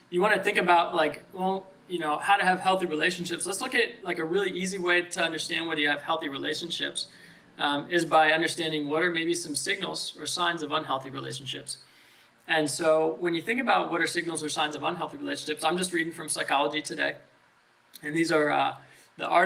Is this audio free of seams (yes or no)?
yes